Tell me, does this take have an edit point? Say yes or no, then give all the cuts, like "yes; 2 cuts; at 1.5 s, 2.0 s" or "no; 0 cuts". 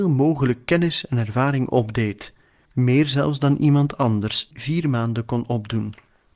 yes; 1 cut; at 4.5 s